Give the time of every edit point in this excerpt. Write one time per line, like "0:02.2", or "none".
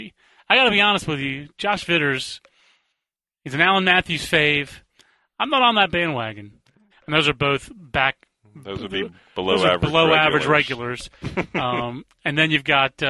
0:06.9
0:11.2